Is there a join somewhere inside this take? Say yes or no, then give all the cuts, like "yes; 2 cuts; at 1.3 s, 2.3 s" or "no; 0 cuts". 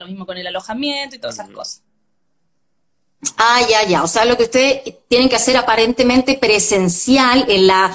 no; 0 cuts